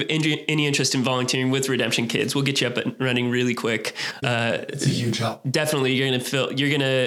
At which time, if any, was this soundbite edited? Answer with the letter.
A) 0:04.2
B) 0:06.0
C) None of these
A